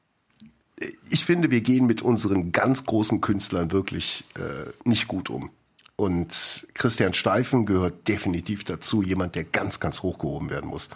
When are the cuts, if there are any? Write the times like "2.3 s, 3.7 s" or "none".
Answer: 4.8 s

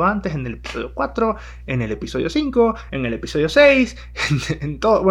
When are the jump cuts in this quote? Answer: none

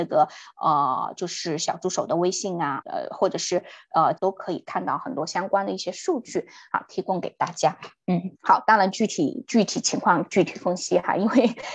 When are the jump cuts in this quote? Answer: 2.8 s, 4.2 s, 8.3 s

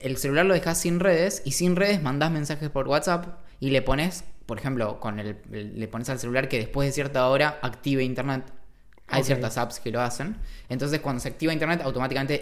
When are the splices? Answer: none

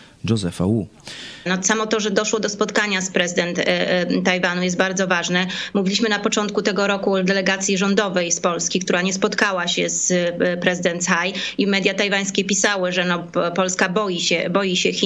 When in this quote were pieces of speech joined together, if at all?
1.5 s

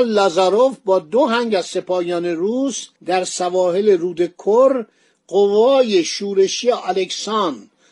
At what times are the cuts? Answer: 2.9 s

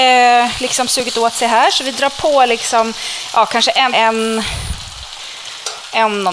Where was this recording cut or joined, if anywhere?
3.9 s

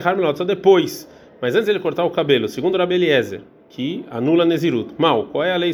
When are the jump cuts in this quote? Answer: none

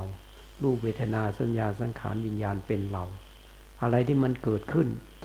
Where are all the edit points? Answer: none

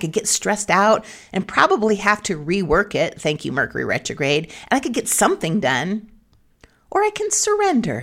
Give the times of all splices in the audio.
none

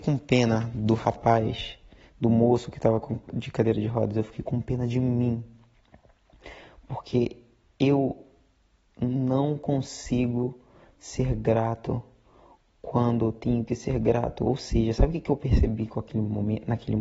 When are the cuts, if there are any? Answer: none

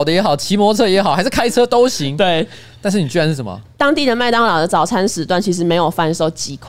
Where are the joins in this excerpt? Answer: 3.7 s

